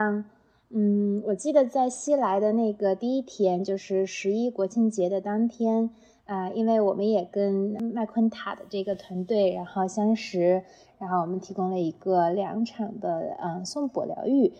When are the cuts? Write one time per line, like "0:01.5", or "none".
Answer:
0:10.9